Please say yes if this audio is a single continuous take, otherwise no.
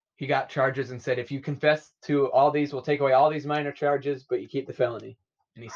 yes